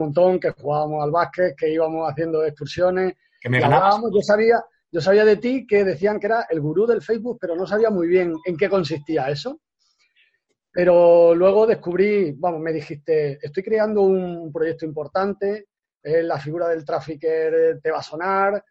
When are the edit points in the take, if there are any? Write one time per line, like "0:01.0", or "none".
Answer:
none